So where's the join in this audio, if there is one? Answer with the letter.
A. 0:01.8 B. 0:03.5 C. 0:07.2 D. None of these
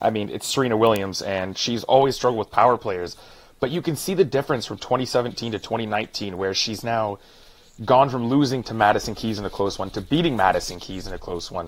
D